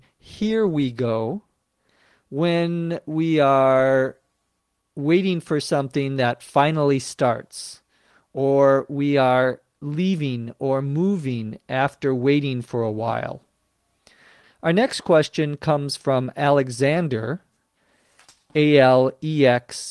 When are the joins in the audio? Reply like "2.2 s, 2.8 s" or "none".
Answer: 14.4 s